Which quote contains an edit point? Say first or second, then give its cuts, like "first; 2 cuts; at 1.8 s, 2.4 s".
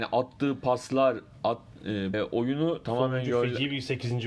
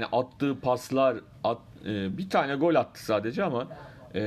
first; 1 cut; at 2.1 s